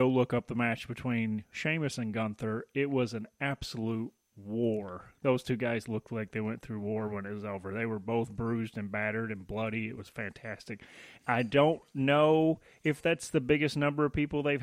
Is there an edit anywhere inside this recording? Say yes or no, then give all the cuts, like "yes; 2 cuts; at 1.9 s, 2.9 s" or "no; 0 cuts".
yes; 1 cut; at 11.2 s